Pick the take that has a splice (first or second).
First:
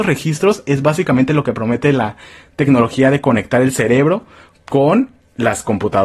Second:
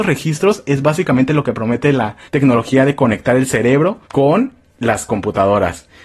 second